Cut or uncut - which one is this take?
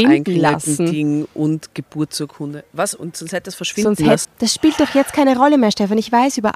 cut